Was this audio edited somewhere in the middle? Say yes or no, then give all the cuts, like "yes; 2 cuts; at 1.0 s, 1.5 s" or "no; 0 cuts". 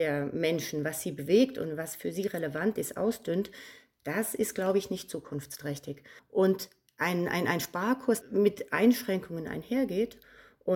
yes; 2 cuts; at 6.2 s, 8.2 s